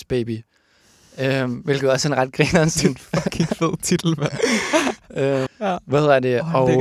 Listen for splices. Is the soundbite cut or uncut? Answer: cut